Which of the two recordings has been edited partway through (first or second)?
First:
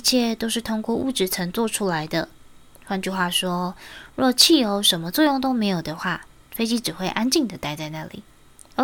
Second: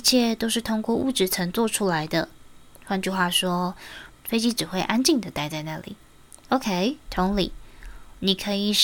second